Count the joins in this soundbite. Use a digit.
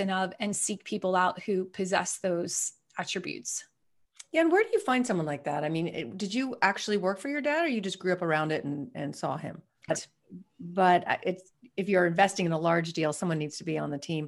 1